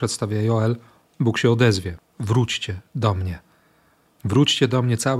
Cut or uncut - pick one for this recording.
cut